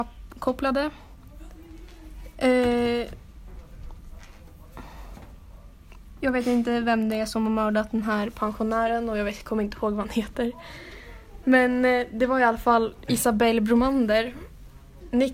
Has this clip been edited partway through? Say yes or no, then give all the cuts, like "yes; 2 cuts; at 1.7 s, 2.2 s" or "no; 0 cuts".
no; 0 cuts